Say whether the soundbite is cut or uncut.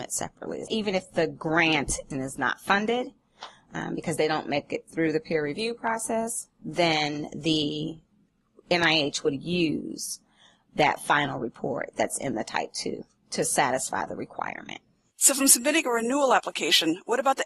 uncut